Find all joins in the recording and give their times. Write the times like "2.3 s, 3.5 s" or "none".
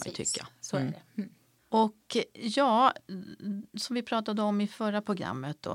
none